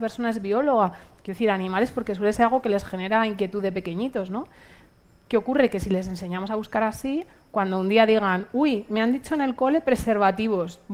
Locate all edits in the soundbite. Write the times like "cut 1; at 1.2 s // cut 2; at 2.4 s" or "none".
none